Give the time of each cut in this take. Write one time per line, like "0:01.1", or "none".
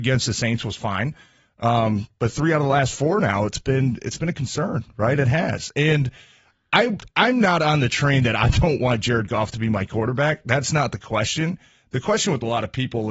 none